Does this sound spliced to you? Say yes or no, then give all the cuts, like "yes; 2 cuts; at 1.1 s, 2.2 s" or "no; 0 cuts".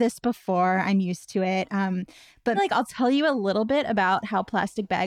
yes; 1 cut; at 2.6 s